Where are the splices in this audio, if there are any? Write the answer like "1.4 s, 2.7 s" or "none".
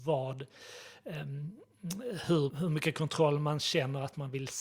2.5 s